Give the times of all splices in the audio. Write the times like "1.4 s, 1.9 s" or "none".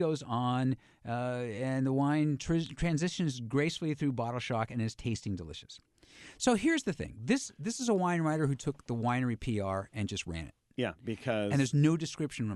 none